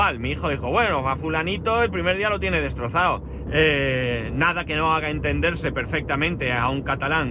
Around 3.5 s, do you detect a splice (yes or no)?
yes